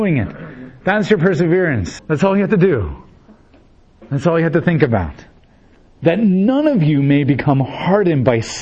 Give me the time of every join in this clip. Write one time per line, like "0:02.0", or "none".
0:02.0